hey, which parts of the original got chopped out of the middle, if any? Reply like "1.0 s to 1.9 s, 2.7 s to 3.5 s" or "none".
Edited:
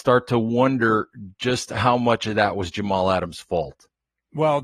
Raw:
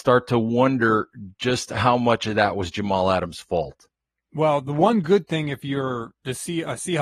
none